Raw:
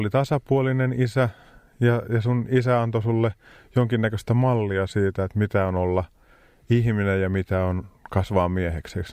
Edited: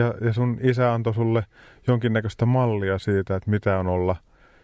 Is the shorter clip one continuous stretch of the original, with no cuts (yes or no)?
yes